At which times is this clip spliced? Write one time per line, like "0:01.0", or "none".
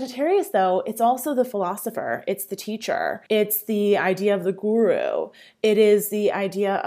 0:03.3